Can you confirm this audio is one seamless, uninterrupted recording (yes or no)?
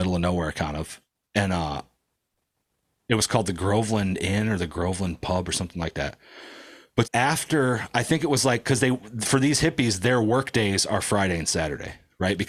no